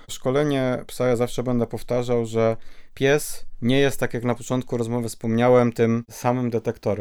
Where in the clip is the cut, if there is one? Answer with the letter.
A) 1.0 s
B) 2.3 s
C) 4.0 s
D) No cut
D